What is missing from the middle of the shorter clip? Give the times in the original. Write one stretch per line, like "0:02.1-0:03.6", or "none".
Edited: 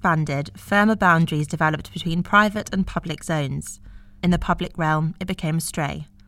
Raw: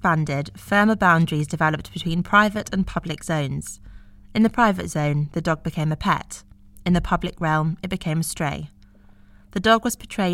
0:04.2-0:06.8